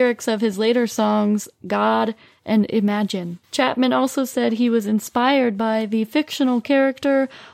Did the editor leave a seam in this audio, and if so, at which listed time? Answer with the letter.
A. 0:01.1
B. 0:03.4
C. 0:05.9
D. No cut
B